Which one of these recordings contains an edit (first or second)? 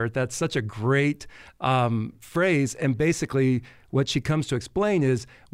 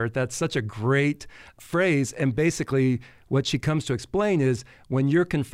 second